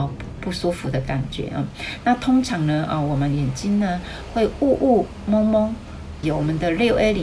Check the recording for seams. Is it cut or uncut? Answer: cut